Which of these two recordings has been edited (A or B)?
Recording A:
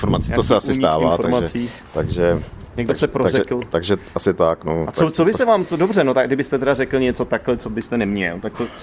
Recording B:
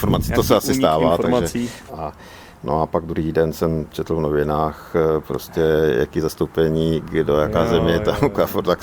B